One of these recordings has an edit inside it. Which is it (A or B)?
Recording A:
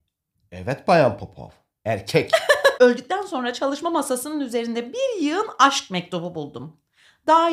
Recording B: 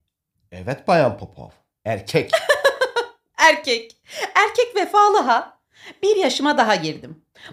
A